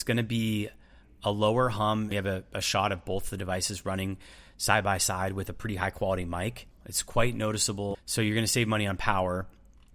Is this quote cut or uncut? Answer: cut